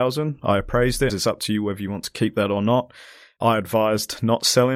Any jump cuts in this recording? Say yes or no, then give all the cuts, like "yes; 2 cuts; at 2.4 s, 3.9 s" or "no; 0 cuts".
yes; 1 cut; at 1.1 s